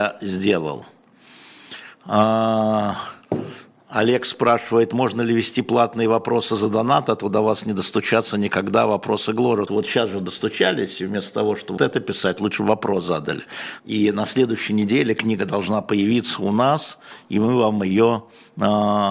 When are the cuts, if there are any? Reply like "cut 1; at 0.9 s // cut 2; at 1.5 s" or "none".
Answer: cut 1; at 9.7 s // cut 2; at 11.8 s // cut 3; at 13.8 s